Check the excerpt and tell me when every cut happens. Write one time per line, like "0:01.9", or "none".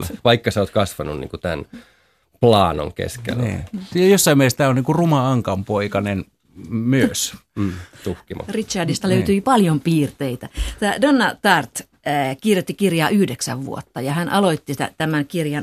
none